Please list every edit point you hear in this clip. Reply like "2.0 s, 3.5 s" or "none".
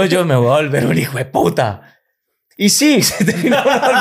none